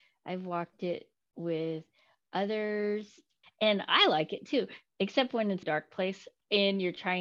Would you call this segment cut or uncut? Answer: cut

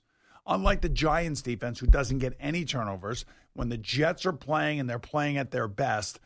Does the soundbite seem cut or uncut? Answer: uncut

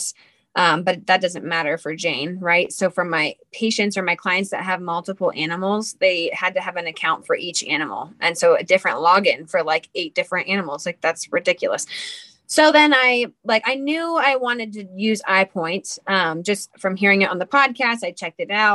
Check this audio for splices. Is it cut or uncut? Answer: uncut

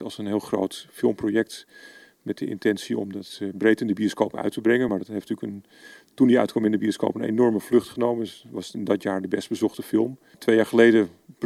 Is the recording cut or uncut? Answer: uncut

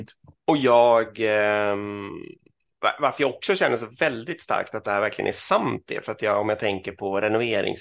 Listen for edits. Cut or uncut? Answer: uncut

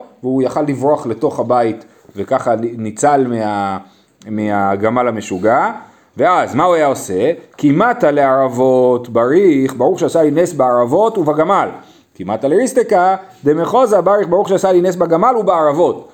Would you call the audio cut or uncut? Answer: uncut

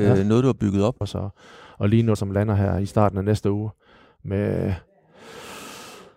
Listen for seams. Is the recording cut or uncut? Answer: cut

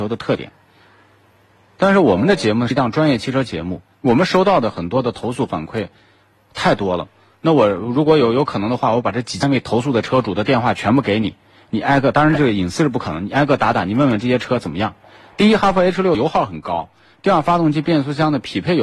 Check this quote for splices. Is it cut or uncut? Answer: uncut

